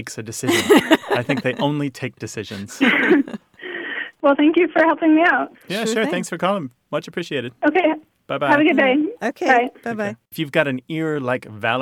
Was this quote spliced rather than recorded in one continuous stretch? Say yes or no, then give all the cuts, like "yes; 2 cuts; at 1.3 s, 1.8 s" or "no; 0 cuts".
yes; 2 cuts; at 6.8 s, 10.2 s